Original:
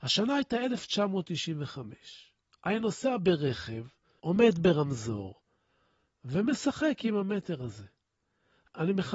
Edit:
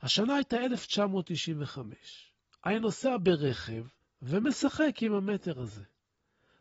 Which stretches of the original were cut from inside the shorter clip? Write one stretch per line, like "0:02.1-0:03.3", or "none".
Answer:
0:04.0-0:06.0